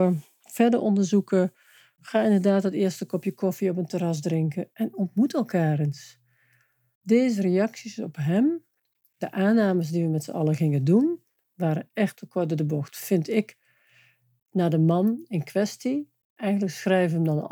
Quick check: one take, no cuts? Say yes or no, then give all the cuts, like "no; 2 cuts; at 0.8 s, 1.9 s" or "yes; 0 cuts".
no; 1 cut; at 16.2 s